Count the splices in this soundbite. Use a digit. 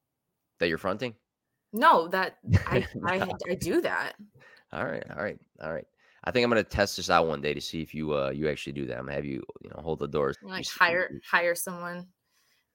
2